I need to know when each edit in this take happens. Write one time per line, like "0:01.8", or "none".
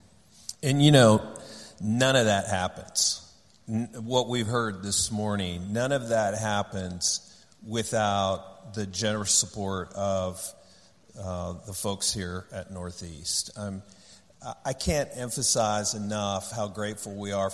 none